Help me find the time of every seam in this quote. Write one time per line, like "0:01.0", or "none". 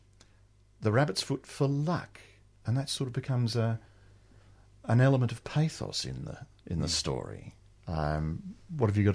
none